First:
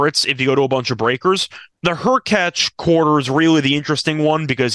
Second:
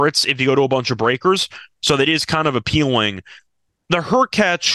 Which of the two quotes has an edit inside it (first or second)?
first